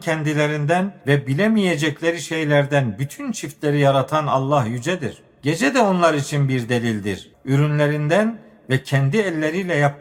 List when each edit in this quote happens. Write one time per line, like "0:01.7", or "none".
0:07.3